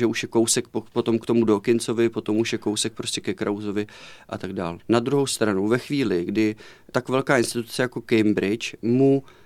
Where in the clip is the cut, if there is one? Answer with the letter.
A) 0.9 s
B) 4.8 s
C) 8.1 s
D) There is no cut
B